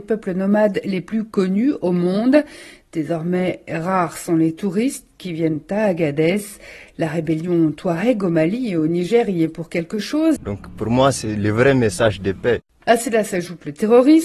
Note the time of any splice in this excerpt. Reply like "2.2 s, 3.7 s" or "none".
10.4 s, 12.8 s